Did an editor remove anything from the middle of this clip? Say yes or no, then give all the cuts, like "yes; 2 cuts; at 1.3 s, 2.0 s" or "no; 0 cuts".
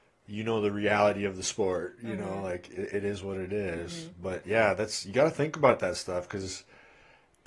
no; 0 cuts